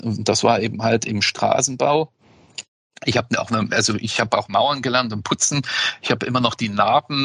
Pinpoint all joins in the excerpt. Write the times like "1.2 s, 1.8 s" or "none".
none